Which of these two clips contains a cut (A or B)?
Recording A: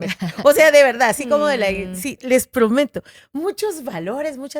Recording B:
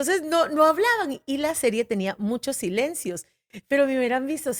A